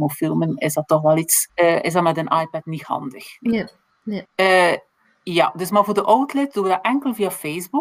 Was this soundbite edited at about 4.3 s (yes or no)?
yes